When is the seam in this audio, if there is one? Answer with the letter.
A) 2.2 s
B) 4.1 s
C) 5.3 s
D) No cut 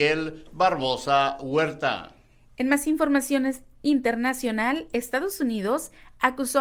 D